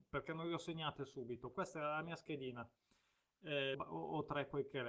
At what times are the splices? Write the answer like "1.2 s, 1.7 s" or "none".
3.7 s